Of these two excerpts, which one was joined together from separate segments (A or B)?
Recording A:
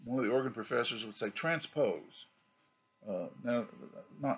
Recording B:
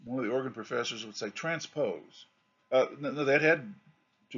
B